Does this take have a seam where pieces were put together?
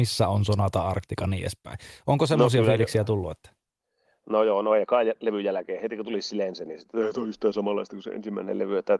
yes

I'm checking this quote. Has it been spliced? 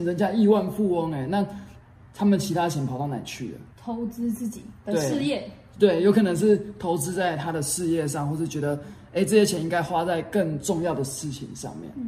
yes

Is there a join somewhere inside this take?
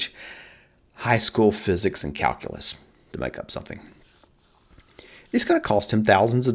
yes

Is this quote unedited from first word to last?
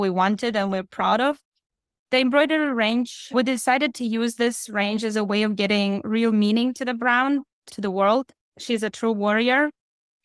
no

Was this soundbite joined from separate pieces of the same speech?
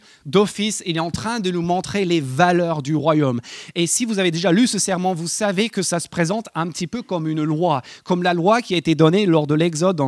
no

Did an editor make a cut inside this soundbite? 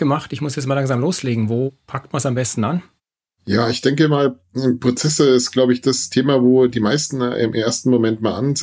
no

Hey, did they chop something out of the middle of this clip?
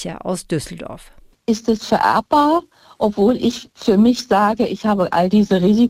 no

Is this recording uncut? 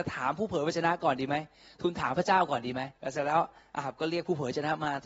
no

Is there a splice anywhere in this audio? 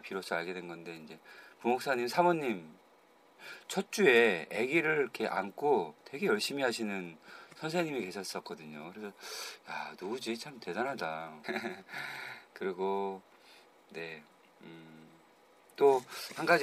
yes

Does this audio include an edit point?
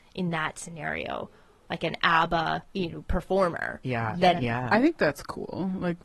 yes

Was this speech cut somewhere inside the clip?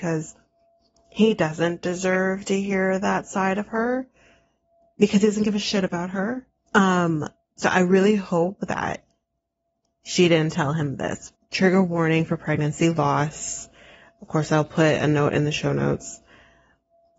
yes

